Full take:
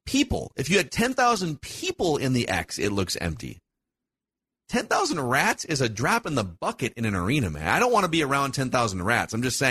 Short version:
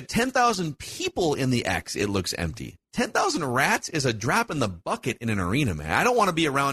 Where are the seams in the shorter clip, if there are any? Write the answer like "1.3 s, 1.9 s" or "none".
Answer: 2.8 s